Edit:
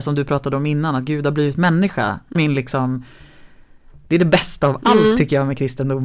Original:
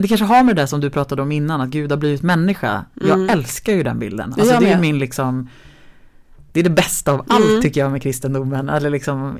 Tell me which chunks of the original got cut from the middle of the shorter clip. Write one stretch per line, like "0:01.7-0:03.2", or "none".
0:03.0-0:04.8